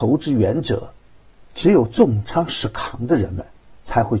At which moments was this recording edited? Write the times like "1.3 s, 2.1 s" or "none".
1.3 s